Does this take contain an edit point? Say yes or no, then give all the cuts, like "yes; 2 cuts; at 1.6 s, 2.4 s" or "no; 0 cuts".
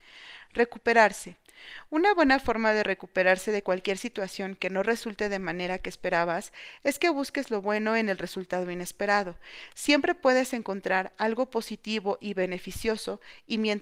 no; 0 cuts